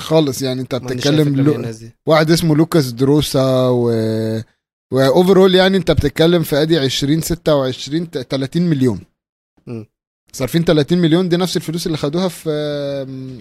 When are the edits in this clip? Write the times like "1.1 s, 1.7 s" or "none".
none